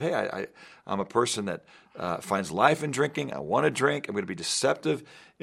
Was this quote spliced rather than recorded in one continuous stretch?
no; 0 cuts

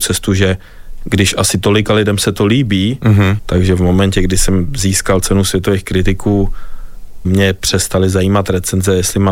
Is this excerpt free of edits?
no; 2 cuts; at 3.4 s, 7.2 s

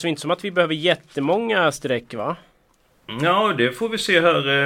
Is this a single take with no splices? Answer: yes; 0 cuts

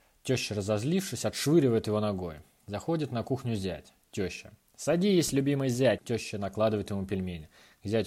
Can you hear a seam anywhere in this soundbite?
yes; 1 cut; at 6.0 s

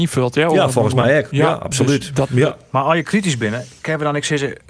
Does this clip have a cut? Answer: no; 0 cuts

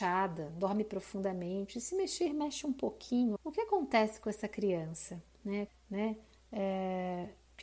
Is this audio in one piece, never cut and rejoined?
no; 2 cuts; at 3.4 s, 5.7 s

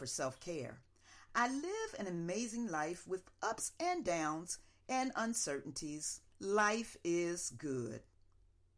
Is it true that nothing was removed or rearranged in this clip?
no; 2 cuts; at 1.3 s, 6.3 s

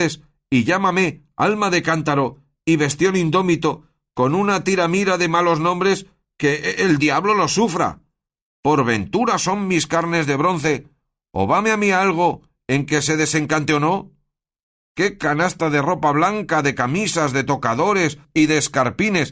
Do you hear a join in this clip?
no; 0 cuts

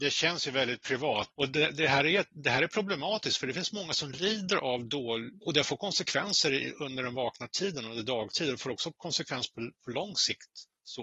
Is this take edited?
yes; 2 cuts; at 1.3 s, 5.4 s

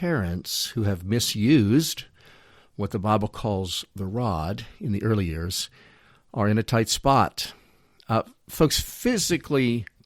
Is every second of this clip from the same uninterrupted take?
yes; 0 cuts

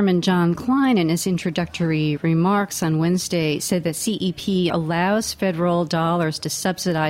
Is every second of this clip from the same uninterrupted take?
no; 1 cut; at 4.7 s

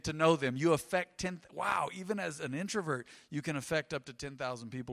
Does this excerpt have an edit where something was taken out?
no; 0 cuts

